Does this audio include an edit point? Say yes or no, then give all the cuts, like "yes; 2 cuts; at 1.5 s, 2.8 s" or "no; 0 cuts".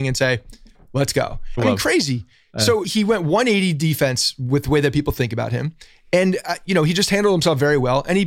yes; 2 cuts; at 1.6 s, 2.8 s